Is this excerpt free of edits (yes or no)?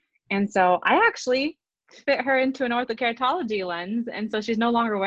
yes